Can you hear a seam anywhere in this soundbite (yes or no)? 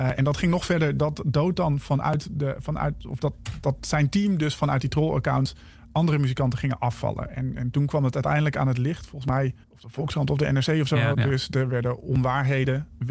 yes